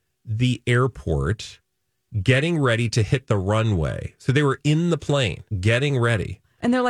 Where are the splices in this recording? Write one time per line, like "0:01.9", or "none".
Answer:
0:05.5